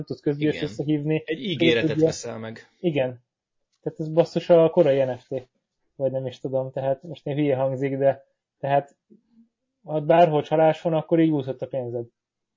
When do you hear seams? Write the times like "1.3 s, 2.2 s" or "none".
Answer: none

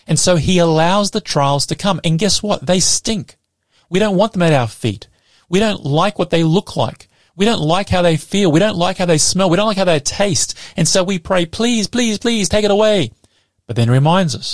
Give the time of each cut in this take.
none

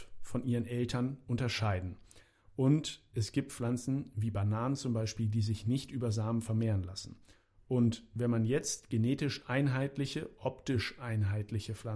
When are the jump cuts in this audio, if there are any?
none

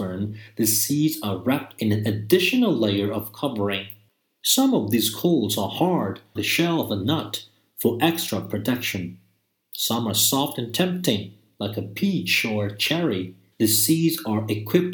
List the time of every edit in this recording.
6.4 s, 13.5 s

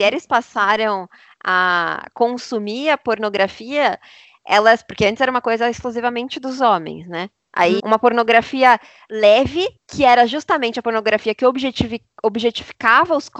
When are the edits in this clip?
7.8 s, 9.8 s

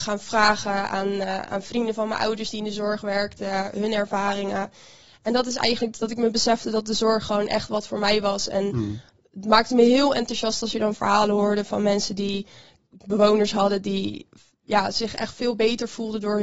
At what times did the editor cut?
none

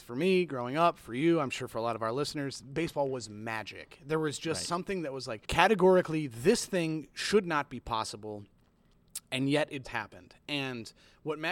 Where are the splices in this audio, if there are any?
5.5 s, 9.8 s

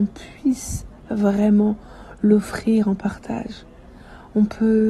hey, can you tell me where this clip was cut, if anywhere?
none

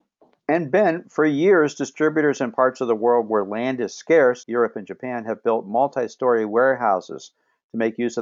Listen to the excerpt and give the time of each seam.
4.4 s

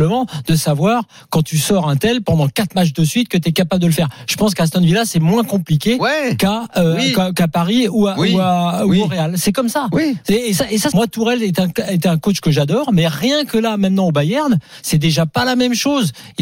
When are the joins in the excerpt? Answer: 10.9 s

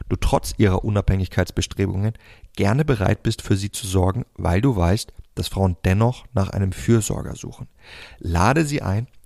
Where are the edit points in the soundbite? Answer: none

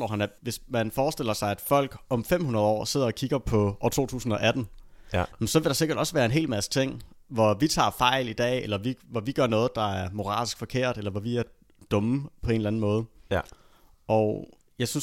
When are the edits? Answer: none

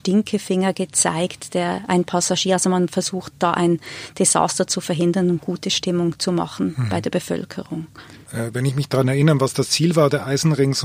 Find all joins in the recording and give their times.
8.2 s

